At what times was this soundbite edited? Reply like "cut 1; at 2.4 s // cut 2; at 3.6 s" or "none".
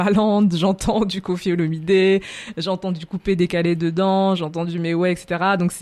none